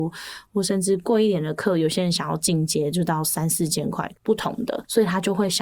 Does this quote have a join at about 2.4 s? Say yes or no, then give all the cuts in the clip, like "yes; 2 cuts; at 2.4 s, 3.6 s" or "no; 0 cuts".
no; 1 cut; at 4.1 s